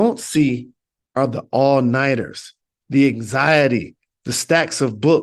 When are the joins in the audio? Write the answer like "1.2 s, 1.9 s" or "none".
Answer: 4.1 s